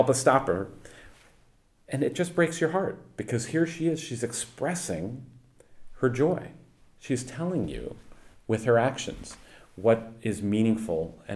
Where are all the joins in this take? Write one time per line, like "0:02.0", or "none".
none